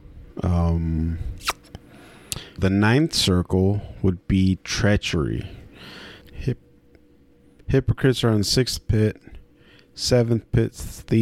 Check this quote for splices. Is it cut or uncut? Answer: cut